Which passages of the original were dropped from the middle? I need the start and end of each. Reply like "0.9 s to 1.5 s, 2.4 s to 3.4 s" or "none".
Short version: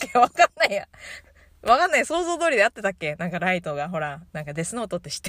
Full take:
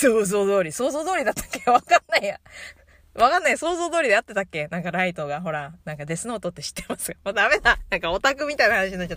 none